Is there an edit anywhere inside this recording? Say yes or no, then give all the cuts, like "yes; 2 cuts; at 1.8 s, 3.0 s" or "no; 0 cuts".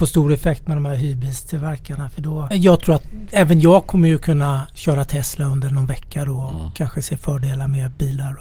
no; 0 cuts